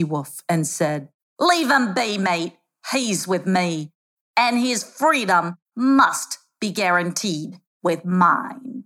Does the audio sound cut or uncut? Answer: uncut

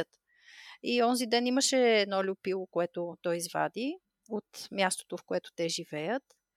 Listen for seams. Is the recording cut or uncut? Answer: uncut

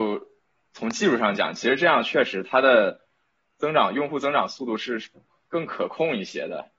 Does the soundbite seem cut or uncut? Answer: uncut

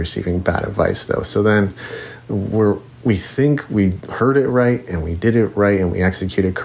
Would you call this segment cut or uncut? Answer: uncut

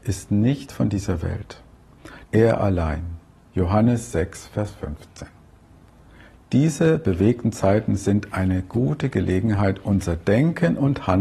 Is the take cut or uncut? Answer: cut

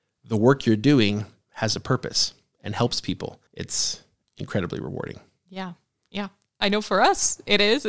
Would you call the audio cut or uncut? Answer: cut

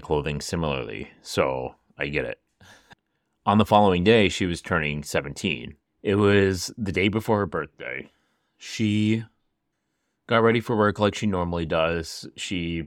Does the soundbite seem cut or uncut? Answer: cut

